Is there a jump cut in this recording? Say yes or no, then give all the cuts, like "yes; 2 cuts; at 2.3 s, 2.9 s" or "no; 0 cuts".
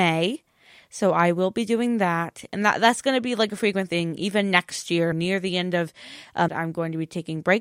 yes; 2 cuts; at 5.1 s, 6.5 s